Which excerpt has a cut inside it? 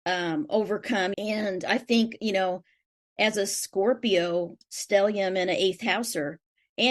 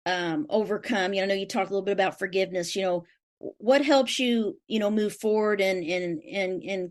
first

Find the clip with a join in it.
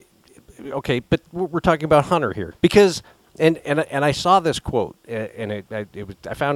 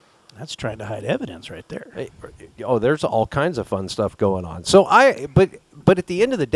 first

